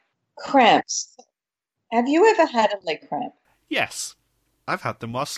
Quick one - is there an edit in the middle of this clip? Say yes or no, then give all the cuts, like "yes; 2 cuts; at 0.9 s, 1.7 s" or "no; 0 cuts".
no; 0 cuts